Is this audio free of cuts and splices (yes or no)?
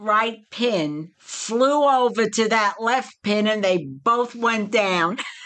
yes